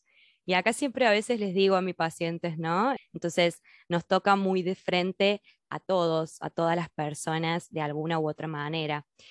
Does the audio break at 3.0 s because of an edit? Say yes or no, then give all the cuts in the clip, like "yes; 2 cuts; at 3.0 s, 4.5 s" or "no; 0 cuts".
yes; 1 cut; at 3.0 s